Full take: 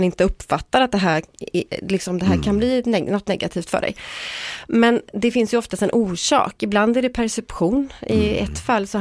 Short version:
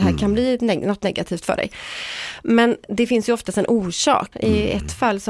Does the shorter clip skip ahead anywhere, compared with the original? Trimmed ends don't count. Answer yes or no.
yes